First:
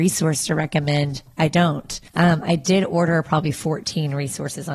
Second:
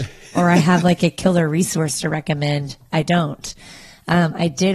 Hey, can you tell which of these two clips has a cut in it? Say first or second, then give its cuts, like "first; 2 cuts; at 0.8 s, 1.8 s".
first; 1 cut; at 2.1 s